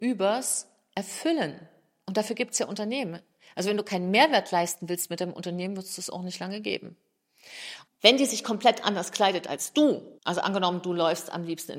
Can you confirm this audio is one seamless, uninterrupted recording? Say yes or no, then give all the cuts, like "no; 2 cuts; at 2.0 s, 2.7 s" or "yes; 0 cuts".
no; 2 cuts; at 7.9 s, 10.2 s